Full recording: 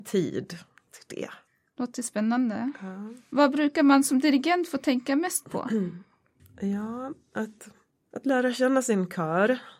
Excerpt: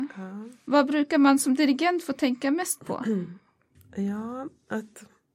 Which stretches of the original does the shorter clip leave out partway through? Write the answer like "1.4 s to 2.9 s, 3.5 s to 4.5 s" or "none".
none